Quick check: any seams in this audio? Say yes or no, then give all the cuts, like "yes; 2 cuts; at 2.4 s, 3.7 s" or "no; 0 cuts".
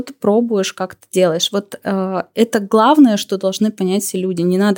no; 0 cuts